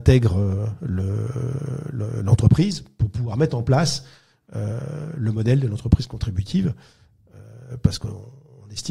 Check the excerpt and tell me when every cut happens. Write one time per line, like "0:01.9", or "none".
none